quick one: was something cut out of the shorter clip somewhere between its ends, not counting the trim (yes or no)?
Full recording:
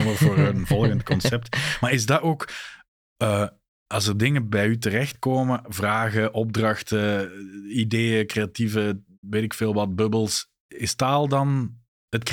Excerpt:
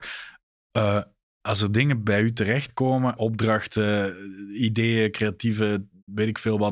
yes